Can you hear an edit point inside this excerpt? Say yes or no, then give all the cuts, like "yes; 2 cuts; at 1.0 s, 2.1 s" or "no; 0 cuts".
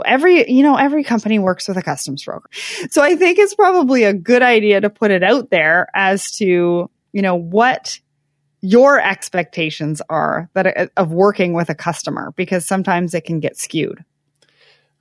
yes; 1 cut; at 2.5 s